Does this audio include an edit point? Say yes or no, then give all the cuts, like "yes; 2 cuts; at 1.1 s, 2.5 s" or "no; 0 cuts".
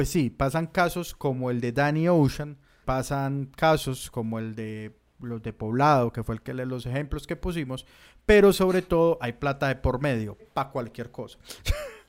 yes; 2 cuts; at 2.8 s, 10.4 s